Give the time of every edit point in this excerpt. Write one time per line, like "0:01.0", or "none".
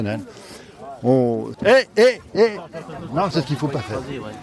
0:01.5
0:03.3